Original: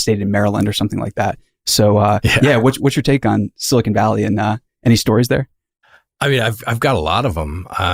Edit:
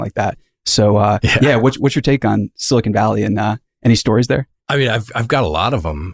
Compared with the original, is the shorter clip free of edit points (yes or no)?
no